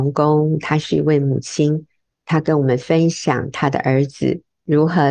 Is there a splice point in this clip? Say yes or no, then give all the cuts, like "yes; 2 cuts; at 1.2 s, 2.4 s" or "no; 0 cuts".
no; 0 cuts